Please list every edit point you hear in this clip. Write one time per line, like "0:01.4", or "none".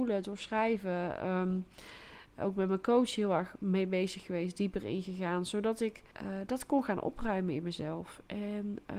0:06.1